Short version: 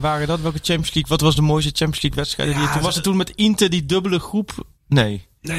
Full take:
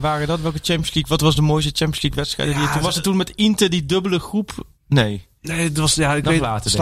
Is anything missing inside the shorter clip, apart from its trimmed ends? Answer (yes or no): no